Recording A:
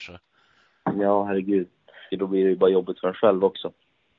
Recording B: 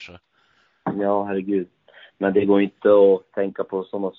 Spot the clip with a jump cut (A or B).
A